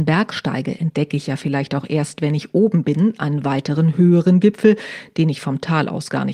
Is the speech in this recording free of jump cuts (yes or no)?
yes